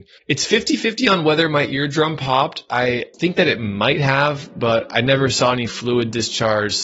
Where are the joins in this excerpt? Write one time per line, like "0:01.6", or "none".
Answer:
none